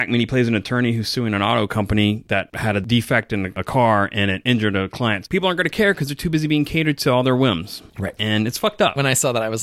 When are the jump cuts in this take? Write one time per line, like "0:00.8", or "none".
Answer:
0:05.2